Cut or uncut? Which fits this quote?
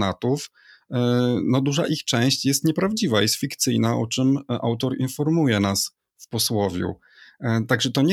uncut